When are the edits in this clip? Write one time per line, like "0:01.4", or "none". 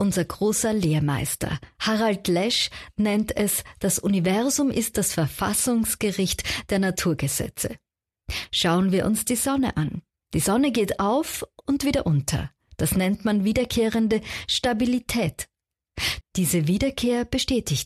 0:16.2

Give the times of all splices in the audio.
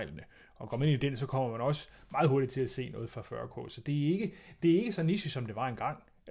none

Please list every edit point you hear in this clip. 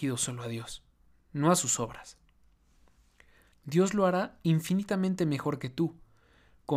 0:03.5

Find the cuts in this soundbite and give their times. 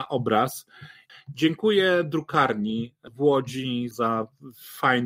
0:01.1
0:03.9

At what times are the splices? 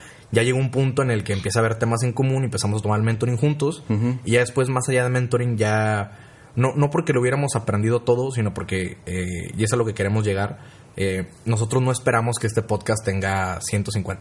none

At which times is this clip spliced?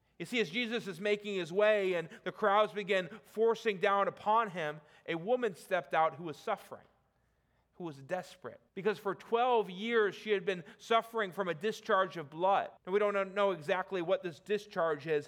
0:08.7
0:12.8

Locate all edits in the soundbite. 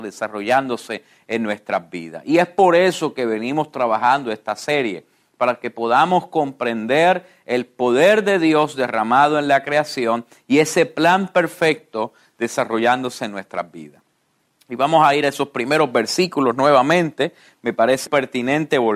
0:18.1

